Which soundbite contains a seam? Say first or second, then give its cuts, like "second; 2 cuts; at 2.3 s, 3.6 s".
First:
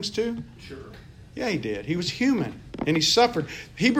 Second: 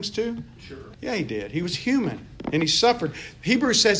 second; 1 cut; at 0.9 s